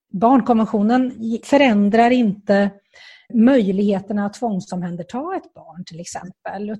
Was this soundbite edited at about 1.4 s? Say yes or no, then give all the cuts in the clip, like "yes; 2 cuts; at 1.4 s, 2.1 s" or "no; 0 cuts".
yes; 2 cuts; at 1.4 s, 3.3 s